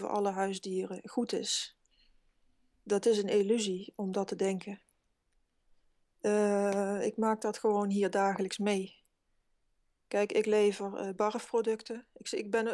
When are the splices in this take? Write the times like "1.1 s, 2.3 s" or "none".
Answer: none

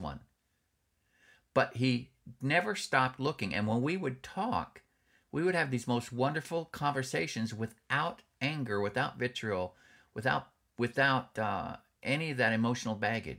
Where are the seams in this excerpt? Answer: none

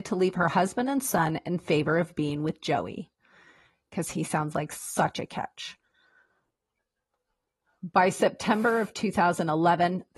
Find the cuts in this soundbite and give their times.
none

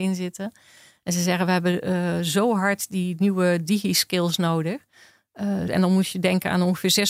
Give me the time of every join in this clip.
5.7 s

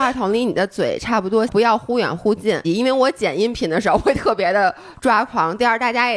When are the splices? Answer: 1.5 s, 2.6 s

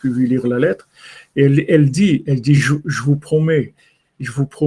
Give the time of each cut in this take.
none

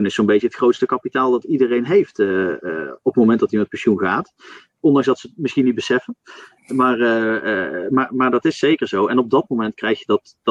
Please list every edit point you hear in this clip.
none

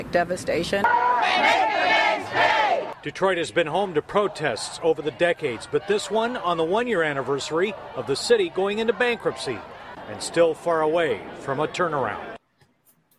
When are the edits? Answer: none

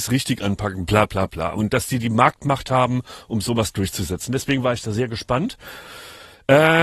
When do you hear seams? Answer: none

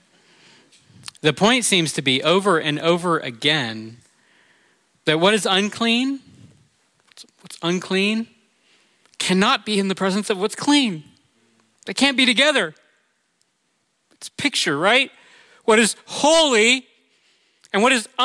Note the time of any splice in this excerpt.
none

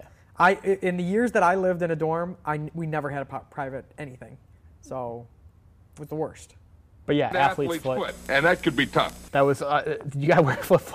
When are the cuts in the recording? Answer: 4.6 s

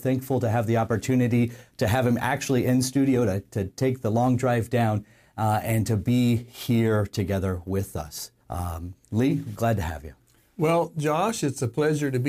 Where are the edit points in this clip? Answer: 8.4 s

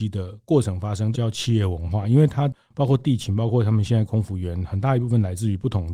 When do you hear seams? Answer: 1.1 s

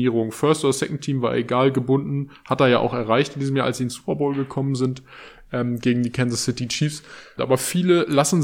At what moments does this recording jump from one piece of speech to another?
7.4 s

